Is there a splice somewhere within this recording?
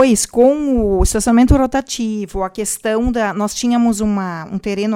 no; 0 cuts

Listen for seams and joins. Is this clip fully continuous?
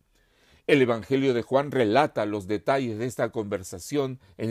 yes; 0 cuts

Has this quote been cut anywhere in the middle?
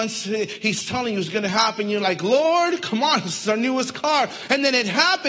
no; 0 cuts

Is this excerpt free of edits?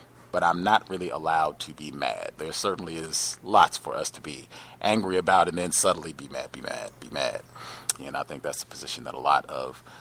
no; 2 cuts; at 2.4 s, 8.0 s

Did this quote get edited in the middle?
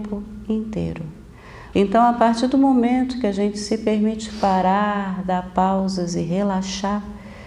yes; 1 cut; at 1.7 s

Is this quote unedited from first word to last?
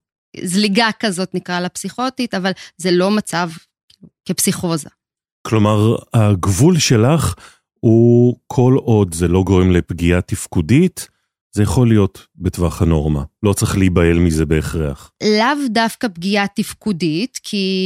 yes; 0 cuts

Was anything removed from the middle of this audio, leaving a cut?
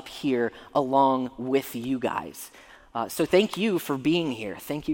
no; 0 cuts

